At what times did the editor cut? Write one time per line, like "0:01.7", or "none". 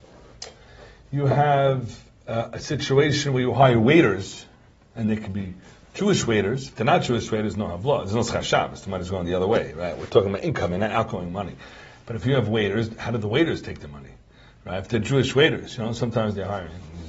none